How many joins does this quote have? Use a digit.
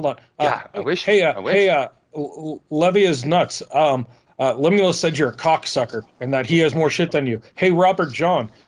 1